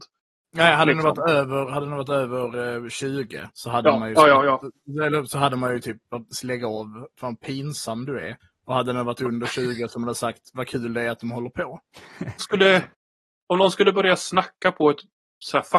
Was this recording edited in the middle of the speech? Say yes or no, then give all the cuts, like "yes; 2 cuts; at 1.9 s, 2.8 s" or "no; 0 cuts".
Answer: yes; 1 cut; at 12.4 s